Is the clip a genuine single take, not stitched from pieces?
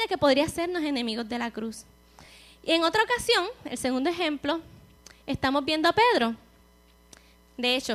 yes; 0 cuts

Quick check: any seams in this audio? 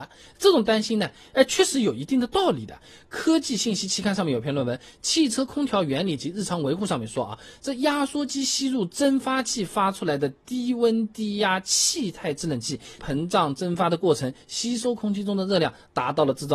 yes; 1 cut; at 13.0 s

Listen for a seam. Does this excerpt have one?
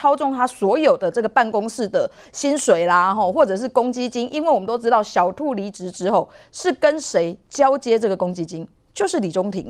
no; 0 cuts

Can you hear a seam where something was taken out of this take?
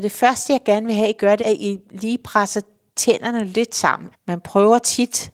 yes; 2 cuts; at 1.4 s, 4.1 s

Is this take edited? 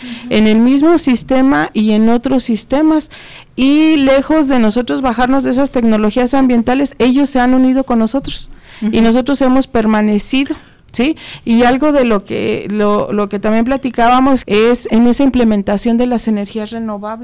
yes; 1 cut; at 14.4 s

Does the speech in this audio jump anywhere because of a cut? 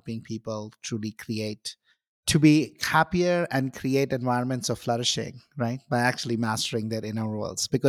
no; 0 cuts

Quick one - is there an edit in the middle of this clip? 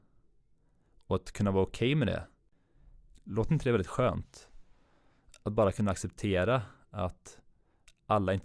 no; 0 cuts

